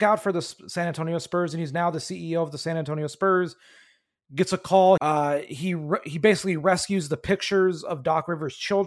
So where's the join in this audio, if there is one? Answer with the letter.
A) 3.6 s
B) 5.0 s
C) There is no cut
B